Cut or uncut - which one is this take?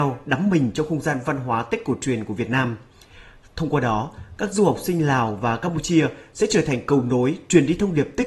uncut